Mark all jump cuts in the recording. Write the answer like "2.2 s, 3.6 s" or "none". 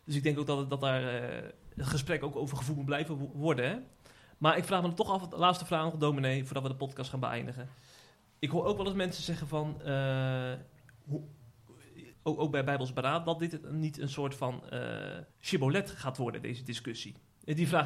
12.1 s, 15.3 s